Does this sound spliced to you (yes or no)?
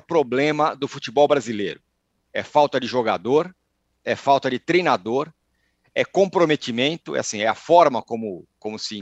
no